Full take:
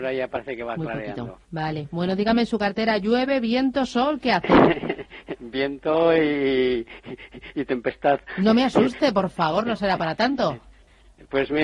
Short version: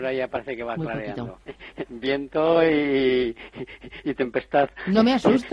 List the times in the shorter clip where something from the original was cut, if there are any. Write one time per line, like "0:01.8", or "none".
0:01.5